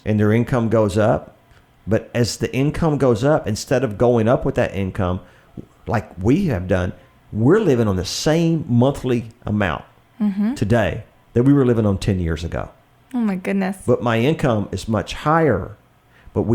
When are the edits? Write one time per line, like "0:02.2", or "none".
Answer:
none